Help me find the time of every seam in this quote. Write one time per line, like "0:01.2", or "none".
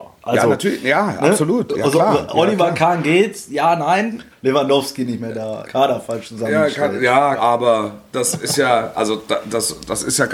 0:04.3
0:05.6
0:07.4